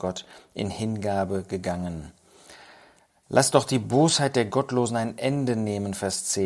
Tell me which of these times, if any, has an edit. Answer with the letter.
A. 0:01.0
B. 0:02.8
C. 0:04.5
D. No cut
D